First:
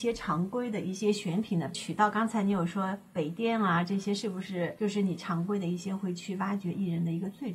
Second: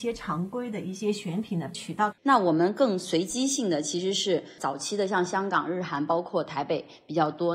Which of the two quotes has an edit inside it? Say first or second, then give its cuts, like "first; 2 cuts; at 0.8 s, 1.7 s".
second; 1 cut; at 2.1 s